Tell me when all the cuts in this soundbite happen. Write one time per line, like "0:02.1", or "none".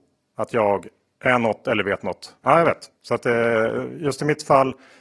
0:02.4